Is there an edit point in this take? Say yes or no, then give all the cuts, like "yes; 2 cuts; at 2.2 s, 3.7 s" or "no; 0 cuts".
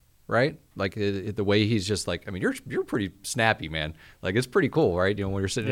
no; 0 cuts